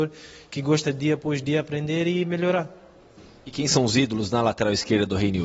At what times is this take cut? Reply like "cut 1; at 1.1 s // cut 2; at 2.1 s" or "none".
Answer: none